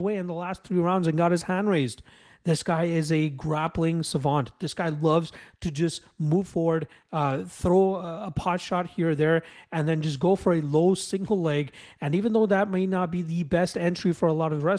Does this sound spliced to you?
no; 0 cuts

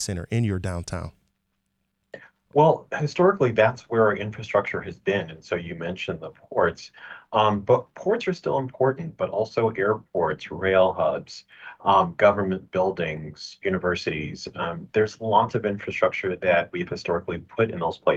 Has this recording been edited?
no; 0 cuts

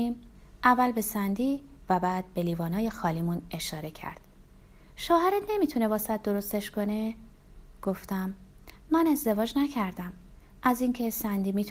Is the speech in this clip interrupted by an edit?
no; 0 cuts

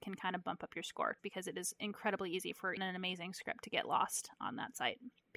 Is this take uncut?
no; 2 cuts; at 1.2 s, 2.8 s

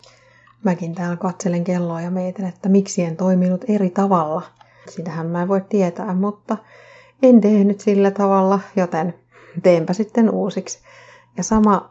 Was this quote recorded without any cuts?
no; 1 cut; at 4.9 s

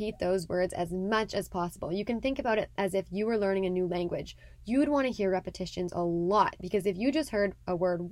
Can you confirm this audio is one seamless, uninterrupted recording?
yes; 0 cuts

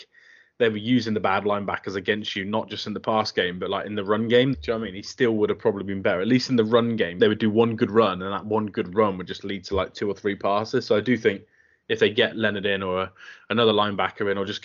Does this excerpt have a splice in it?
yes; 2 cuts; at 4.5 s, 7.2 s

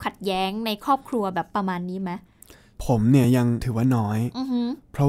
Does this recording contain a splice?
no; 0 cuts

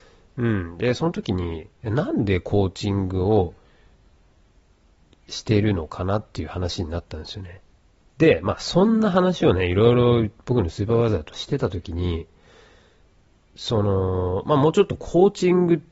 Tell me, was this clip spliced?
yes; 1 cut; at 8.0 s

